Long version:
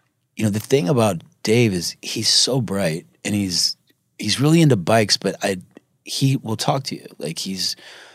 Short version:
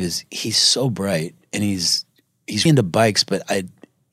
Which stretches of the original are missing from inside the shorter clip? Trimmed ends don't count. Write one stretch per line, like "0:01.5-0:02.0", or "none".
0:04.4-0:04.6